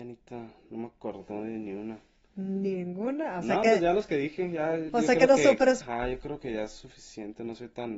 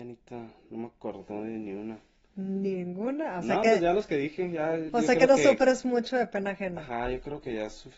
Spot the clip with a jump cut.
first; 1 cut; at 5.8 s

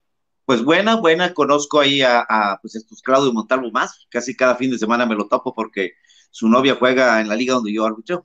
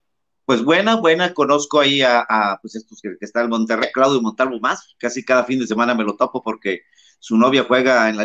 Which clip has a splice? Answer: first; 1 cut; at 3.0 s

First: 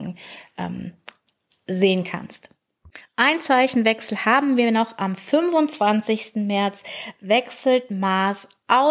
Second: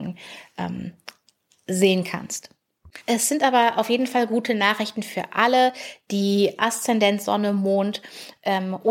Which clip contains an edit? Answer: second; 1 cut; at 3.0 s

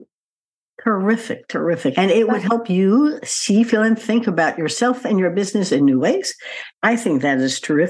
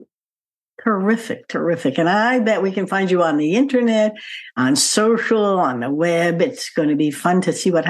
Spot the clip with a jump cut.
first; 2 cuts; at 1.9 s, 6.7 s

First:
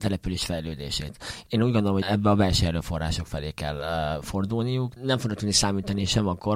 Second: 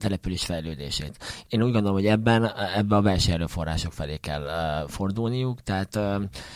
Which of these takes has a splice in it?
first; 2 cuts; at 2.0 s, 5.0 s

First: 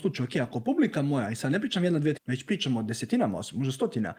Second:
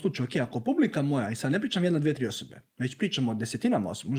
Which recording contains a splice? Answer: first; 1 cut; at 2.2 s

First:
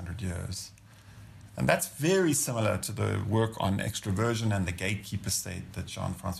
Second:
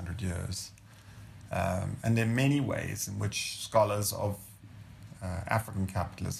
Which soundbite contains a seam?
first; 1 cut; at 1.5 s

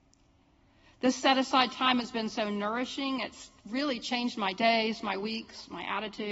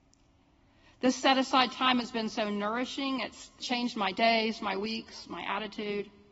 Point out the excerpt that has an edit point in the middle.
second; 1 cut; at 3.6 s

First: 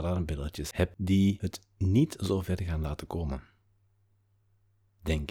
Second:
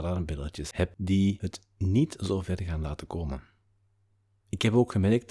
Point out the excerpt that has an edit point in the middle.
second; 1 cut; at 4.4 s

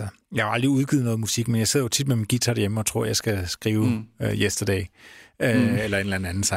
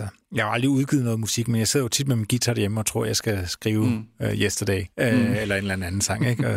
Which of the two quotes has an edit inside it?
second; 1 cut; at 4.9 s

